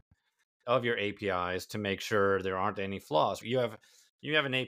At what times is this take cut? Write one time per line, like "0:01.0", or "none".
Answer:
0:03.4